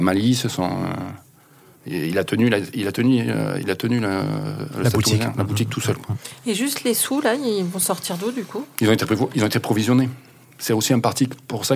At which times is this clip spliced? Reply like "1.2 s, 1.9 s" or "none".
none